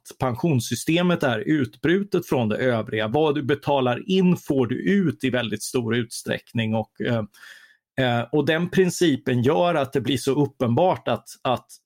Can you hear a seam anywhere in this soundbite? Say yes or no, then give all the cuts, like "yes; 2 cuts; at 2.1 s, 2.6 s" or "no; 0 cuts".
no; 0 cuts